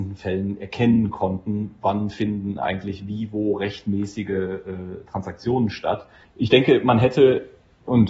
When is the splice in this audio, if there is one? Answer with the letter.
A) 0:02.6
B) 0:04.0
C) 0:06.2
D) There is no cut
C